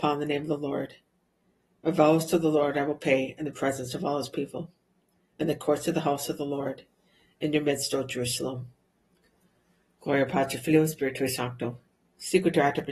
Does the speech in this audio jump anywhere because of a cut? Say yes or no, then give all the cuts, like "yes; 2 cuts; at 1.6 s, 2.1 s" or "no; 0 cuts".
no; 0 cuts